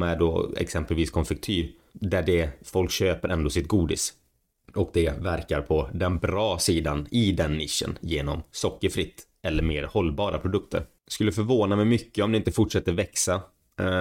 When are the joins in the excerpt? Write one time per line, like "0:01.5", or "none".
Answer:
none